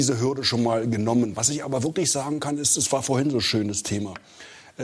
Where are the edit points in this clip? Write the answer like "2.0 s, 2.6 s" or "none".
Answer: none